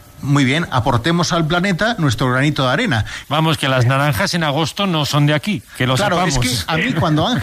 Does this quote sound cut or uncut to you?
cut